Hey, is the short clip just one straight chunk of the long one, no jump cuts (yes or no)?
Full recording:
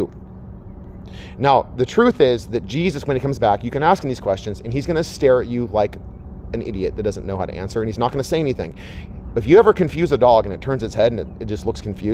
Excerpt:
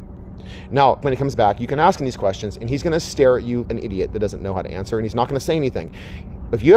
no